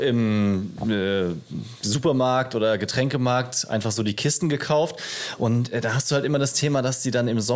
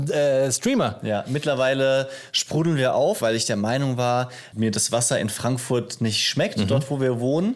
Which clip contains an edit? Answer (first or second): second